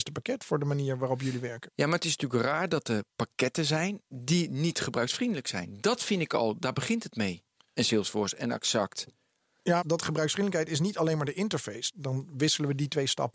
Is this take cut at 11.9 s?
yes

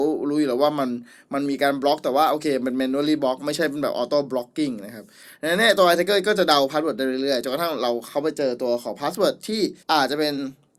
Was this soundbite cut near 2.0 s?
no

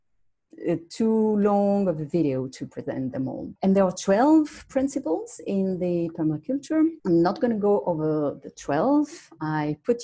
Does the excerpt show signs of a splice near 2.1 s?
no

